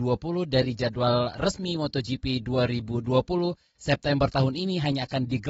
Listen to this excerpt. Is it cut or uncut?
uncut